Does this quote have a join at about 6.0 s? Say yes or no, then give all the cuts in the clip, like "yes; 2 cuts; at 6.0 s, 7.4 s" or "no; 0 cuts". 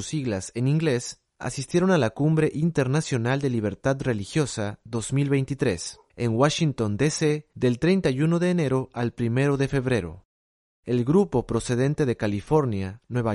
no; 0 cuts